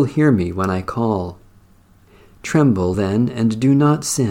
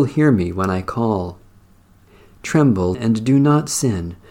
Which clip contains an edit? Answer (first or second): second